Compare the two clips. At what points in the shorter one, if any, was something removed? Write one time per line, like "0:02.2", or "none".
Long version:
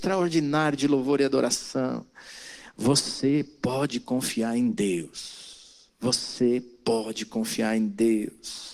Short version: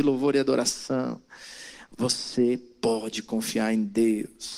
0:01.9